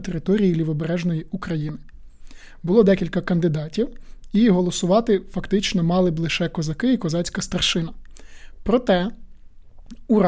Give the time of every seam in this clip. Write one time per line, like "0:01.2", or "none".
none